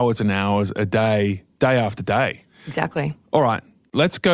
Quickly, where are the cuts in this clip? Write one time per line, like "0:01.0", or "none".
none